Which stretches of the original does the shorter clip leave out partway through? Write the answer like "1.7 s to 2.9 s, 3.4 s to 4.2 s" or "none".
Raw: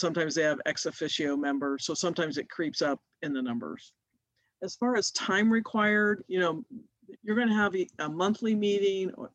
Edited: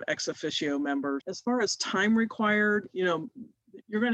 1.8 s to 4.6 s